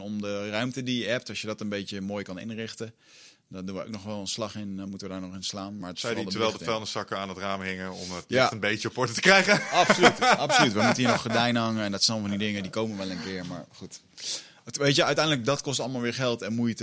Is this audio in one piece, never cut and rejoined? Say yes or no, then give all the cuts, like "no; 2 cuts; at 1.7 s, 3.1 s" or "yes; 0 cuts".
yes; 0 cuts